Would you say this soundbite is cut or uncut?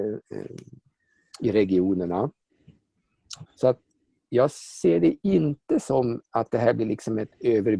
cut